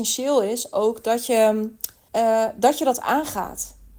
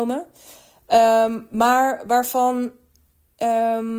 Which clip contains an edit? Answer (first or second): first